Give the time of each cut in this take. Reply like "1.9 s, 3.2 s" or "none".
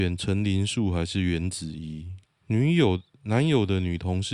2.2 s